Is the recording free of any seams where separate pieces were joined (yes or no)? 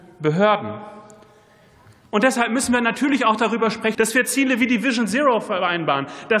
no